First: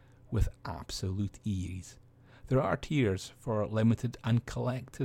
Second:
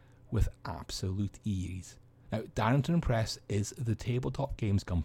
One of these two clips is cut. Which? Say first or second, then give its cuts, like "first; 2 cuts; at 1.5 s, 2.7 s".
second; 1 cut; at 2.3 s